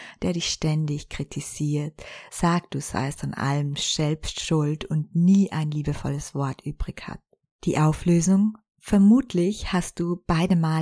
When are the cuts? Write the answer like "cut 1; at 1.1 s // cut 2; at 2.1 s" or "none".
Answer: none